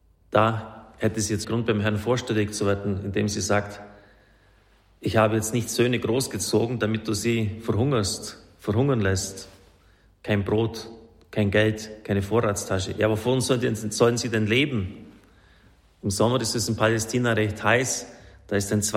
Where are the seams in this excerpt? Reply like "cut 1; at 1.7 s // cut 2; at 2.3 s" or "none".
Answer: cut 1; at 1.4 s